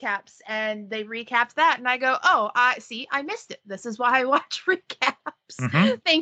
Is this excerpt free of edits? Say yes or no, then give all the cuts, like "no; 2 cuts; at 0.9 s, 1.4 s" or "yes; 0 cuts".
yes; 0 cuts